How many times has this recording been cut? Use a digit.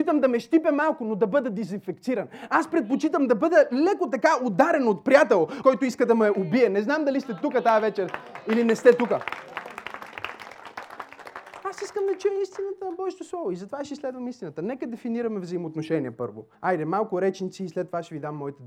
2